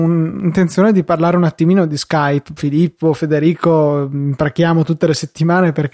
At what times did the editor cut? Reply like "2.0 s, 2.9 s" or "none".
2.6 s